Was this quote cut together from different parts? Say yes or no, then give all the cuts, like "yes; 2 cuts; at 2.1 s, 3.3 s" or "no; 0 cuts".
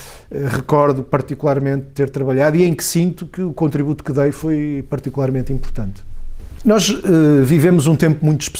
yes; 1 cut; at 6.6 s